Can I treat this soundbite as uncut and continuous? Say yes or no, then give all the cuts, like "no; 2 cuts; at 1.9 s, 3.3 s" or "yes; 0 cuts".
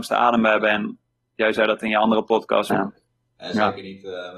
no; 1 cut; at 2.7 s